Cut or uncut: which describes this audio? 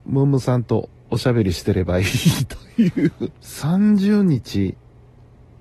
cut